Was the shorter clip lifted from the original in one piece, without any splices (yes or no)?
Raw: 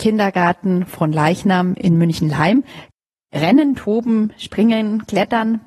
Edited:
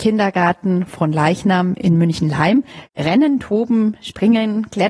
no